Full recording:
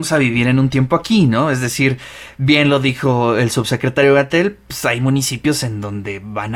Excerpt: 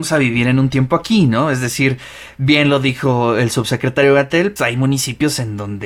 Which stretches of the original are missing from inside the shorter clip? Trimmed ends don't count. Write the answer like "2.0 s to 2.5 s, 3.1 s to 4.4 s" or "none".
4.6 s to 4.8 s

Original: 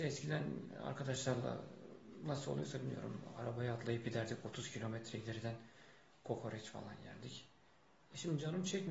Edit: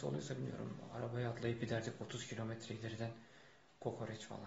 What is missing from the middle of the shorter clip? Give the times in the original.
none

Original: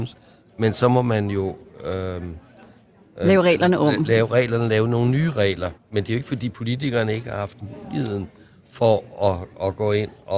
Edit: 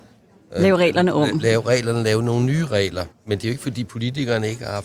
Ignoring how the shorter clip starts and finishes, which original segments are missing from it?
none

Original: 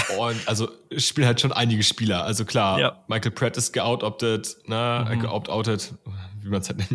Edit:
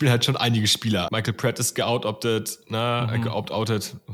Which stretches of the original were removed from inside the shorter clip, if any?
2.2 s to 3.1 s

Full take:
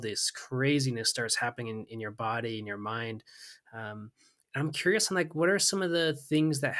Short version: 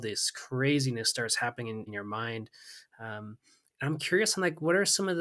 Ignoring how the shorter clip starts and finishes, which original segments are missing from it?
1.9 s to 2.6 s

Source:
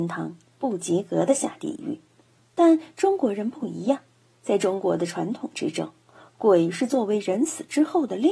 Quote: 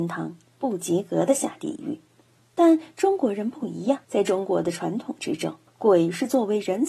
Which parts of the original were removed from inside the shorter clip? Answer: 4.0 s to 4.4 s, 6.0 s to 6.3 s

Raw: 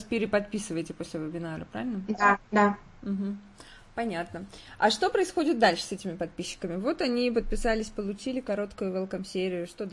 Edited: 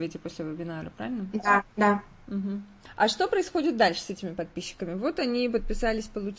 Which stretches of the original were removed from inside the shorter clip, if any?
3.6 s to 4.7 s

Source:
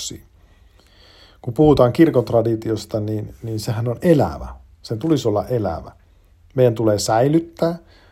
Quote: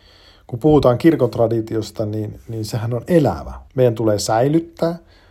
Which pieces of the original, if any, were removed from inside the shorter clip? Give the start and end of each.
4.6 s to 6.5 s

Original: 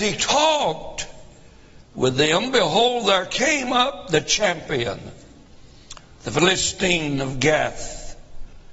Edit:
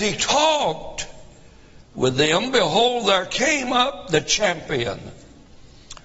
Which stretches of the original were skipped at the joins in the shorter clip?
none

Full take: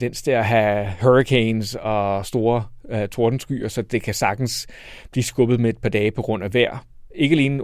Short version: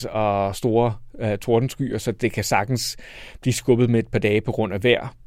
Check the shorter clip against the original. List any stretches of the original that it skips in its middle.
none

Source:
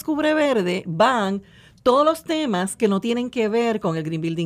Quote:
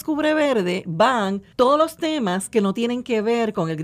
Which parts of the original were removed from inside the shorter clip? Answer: 1.5 s to 1.8 s

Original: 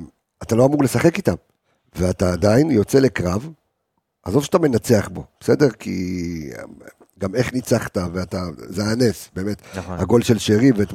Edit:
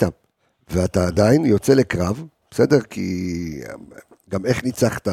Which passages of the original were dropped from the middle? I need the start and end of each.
3.7 s to 5.3 s

